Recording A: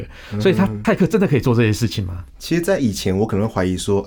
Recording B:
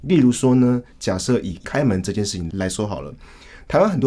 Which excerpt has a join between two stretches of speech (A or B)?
A